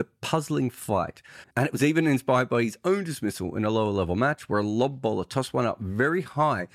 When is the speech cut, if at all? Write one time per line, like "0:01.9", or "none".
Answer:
0:01.4